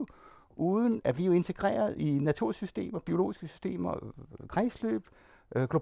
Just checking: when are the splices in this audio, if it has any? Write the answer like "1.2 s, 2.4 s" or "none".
1.0 s